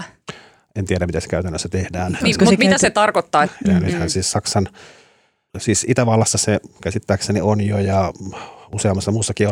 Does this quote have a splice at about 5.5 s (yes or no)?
yes